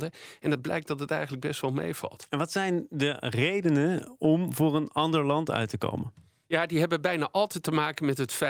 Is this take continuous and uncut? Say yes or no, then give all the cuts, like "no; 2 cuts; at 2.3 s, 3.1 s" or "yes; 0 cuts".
yes; 0 cuts